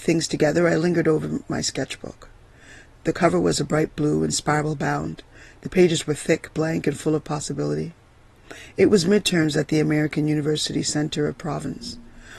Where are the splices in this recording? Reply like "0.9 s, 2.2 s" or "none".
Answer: none